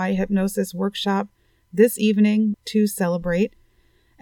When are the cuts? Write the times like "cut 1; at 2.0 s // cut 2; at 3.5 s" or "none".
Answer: cut 1; at 2.5 s